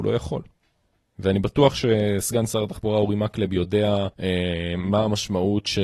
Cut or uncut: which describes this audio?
cut